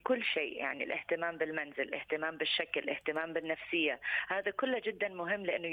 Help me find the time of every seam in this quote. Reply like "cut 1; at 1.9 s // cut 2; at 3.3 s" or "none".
none

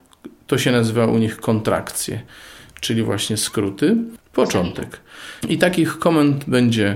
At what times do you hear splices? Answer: cut 1; at 4.2 s // cut 2; at 5.4 s

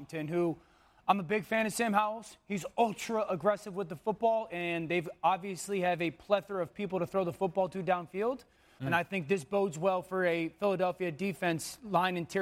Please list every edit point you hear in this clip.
cut 1; at 8.8 s

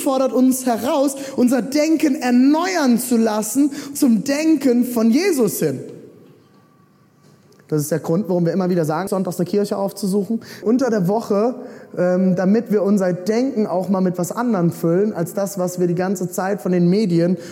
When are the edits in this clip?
cut 1; at 9.1 s // cut 2; at 10.6 s

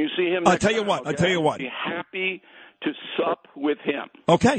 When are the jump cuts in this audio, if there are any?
cut 1; at 1.6 s

